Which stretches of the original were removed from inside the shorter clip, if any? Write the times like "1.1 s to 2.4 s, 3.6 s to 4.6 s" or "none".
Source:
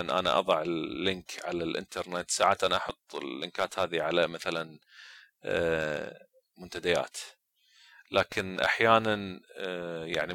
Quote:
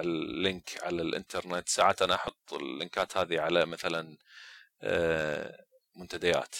none